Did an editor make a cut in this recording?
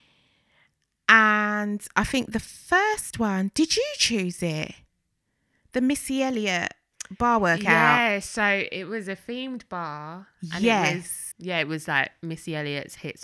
yes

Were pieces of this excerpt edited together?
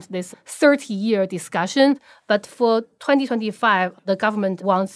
no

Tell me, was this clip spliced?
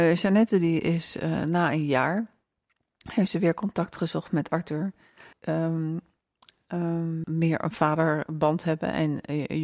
yes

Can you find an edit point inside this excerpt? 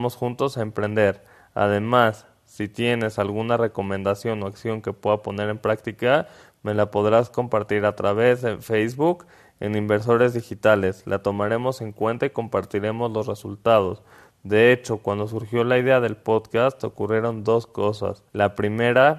yes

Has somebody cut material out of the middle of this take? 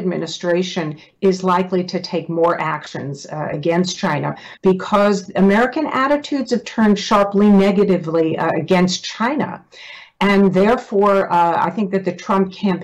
yes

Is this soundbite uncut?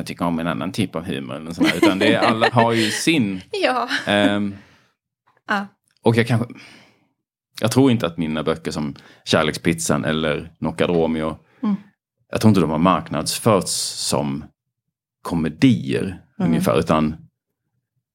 no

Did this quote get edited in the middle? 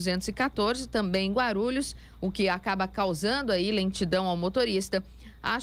no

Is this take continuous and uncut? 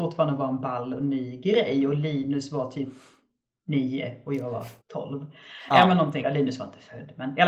no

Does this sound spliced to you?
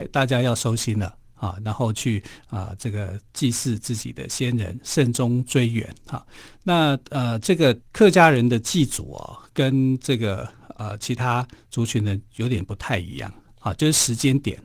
yes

